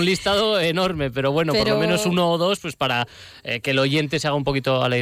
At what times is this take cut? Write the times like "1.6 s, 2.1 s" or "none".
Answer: none